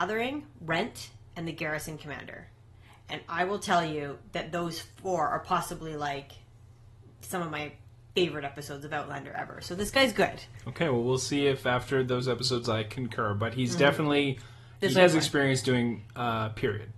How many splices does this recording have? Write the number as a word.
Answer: one